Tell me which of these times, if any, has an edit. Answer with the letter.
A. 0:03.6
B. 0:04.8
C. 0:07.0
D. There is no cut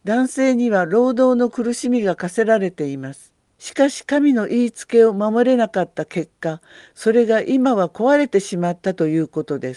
A